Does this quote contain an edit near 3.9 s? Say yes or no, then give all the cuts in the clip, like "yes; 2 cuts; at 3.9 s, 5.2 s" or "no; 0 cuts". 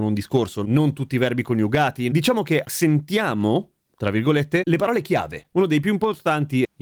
no; 2 cuts; at 2.1 s, 5.5 s